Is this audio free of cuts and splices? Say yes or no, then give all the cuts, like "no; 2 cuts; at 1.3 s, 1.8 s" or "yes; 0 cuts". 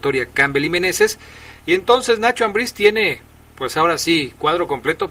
yes; 0 cuts